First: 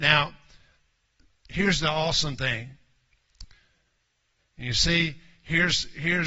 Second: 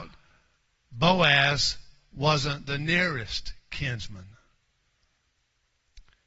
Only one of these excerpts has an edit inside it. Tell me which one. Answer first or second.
first